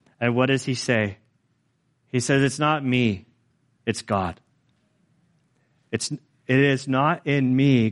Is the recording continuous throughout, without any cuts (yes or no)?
yes